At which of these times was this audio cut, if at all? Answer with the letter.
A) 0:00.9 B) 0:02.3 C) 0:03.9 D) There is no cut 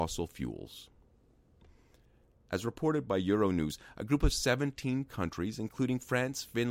D